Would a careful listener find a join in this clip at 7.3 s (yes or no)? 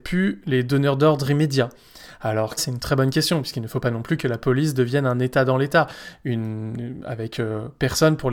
no